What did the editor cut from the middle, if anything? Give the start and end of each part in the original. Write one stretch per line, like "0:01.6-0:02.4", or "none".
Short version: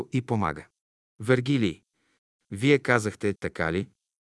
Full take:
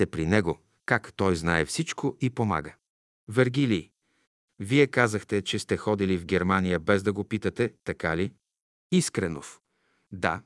0:05.4-0:07.8